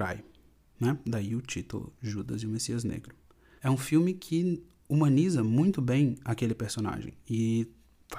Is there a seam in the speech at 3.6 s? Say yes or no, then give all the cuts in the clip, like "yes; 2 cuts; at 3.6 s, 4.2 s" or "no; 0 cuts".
yes; 1 cut; at 3.6 s